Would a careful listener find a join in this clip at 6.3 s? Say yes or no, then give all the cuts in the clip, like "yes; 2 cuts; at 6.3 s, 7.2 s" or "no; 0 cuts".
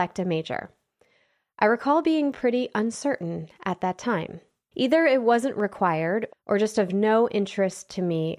yes; 2 cuts; at 4.7 s, 6.3 s